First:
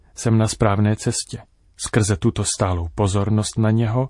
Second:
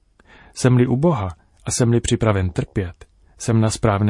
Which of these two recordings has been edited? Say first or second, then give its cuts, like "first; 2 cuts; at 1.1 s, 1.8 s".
first; 1 cut; at 1.6 s